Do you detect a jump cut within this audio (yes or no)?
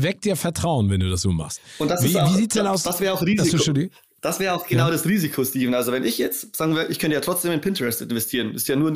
no